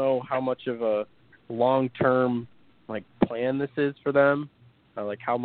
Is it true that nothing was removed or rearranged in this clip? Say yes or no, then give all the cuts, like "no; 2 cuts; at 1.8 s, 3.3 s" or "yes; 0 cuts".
yes; 0 cuts